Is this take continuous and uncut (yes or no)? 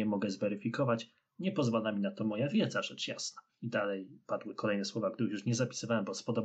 yes